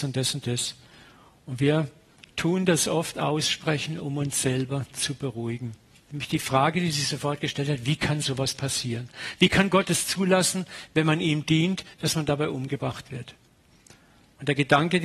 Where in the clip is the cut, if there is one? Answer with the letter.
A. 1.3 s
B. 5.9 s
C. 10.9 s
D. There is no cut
B